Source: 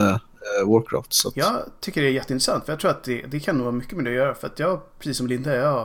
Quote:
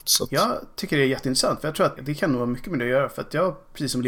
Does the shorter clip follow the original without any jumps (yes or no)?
no